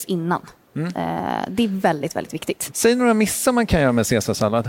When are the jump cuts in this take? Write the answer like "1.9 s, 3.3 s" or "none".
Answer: 2.7 s